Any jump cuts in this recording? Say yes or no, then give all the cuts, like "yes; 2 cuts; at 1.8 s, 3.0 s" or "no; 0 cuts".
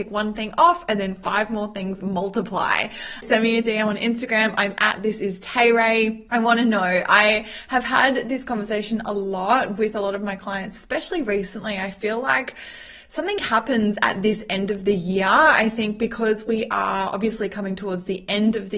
yes; 1 cut; at 3.2 s